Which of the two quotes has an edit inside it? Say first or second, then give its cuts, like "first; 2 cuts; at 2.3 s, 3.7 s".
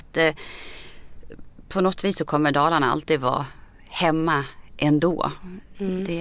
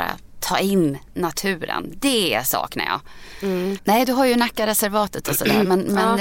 second; 1 cut; at 3.8 s